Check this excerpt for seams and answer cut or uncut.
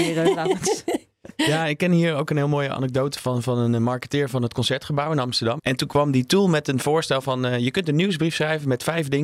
cut